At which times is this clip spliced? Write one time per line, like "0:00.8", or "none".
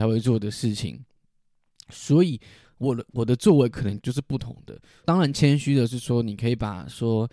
0:02.6
0:05.0